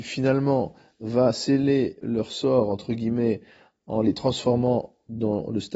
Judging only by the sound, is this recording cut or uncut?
cut